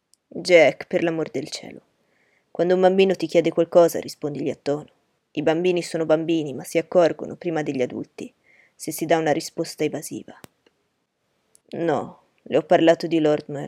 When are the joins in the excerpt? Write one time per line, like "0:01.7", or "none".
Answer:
0:05.2
0:11.6